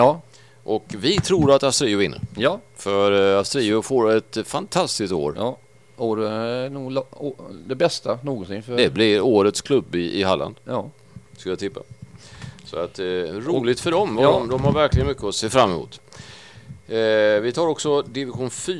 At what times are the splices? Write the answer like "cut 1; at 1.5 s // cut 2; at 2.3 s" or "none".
none